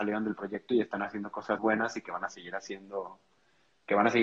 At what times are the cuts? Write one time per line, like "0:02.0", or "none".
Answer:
0:01.6